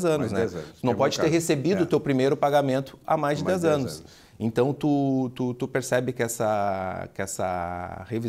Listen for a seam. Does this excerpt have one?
no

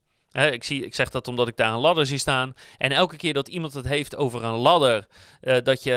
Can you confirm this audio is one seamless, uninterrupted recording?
yes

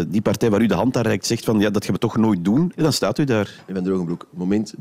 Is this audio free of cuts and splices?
no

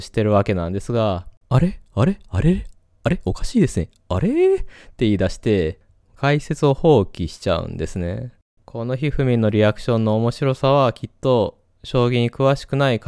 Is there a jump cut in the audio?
yes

